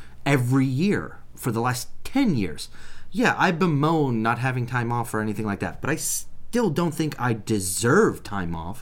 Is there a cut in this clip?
no; 0 cuts

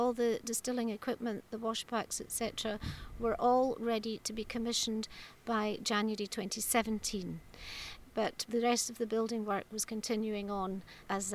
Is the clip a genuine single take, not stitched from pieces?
yes; 0 cuts

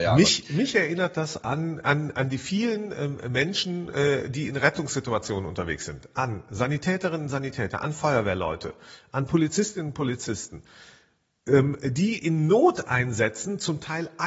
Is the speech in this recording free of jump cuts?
yes; 0 cuts

